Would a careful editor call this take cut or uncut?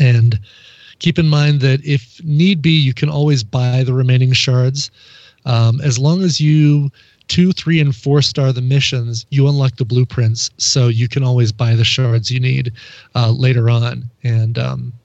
uncut